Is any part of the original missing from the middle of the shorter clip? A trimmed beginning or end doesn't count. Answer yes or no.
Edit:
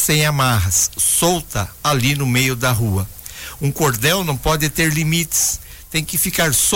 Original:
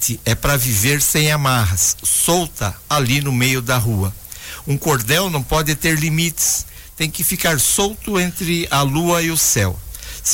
no